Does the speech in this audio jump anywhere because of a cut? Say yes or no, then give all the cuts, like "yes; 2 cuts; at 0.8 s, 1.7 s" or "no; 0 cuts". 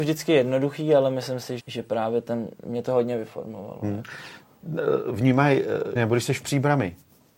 yes; 2 cuts; at 1.6 s, 6.0 s